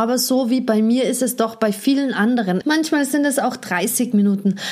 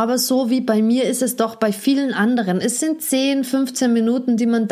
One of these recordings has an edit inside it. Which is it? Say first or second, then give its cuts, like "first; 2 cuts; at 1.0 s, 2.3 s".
first; 1 cut; at 2.6 s